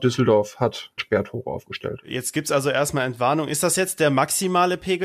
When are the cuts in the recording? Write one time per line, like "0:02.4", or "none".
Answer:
0:01.0